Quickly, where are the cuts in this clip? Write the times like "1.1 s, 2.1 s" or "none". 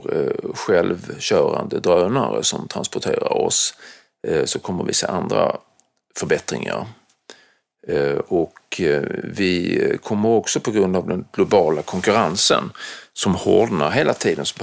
none